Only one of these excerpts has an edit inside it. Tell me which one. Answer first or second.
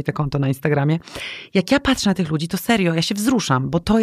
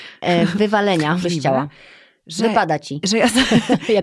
second